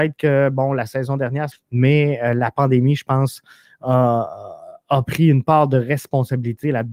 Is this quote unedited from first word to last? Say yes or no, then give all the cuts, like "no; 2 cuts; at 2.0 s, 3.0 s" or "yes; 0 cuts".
no; 1 cut; at 1.5 s